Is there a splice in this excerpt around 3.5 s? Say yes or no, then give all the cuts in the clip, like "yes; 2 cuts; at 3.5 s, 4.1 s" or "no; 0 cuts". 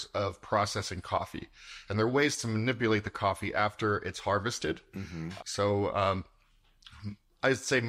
no; 1 cut; at 5.4 s